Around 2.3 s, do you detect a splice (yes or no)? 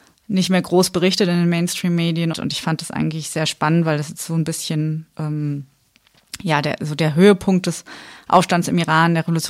yes